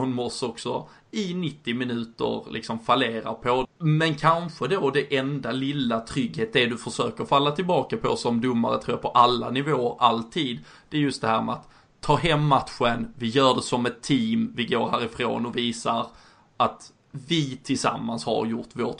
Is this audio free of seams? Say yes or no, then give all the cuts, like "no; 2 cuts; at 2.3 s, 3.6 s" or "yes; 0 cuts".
no; 1 cut; at 3.6 s